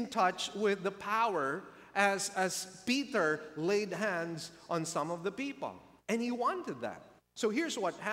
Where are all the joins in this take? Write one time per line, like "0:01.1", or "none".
none